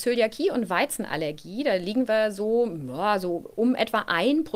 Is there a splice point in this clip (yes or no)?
no